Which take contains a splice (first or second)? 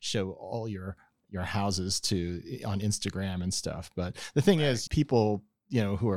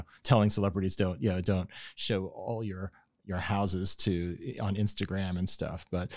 first